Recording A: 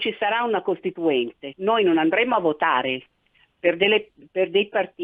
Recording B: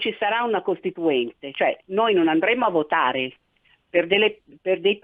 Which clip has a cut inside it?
A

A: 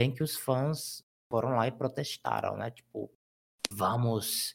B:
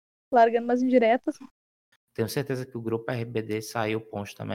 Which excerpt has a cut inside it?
B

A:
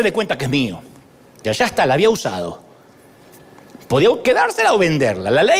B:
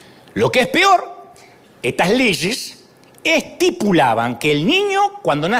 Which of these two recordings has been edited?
A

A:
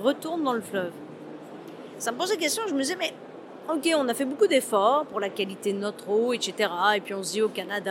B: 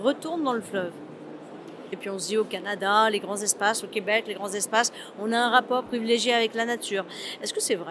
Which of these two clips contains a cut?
B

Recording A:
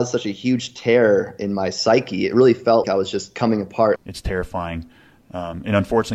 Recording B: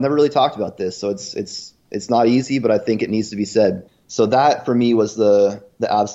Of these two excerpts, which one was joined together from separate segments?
A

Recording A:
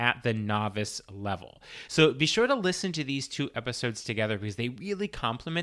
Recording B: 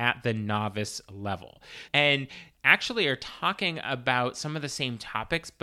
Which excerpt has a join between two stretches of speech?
B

